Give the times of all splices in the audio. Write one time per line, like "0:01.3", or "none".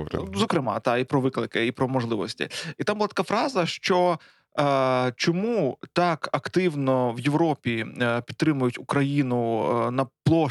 none